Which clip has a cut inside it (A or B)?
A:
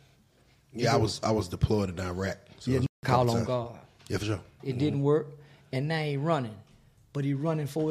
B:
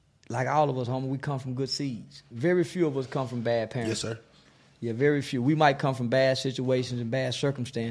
A